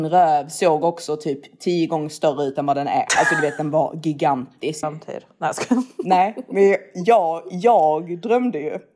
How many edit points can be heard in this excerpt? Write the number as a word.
one